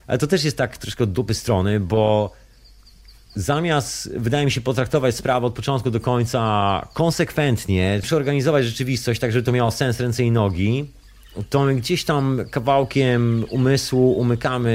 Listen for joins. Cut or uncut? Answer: cut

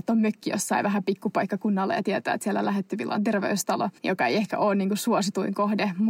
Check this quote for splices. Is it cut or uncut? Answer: cut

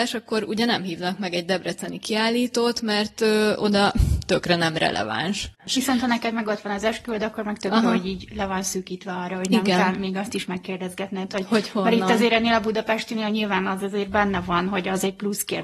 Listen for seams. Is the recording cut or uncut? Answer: cut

